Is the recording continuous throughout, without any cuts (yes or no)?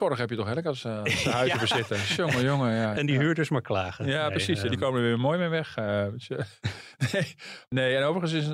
yes